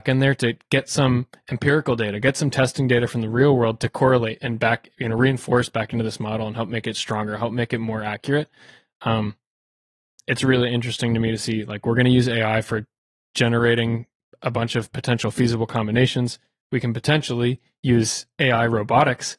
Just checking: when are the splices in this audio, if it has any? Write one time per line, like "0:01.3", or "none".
none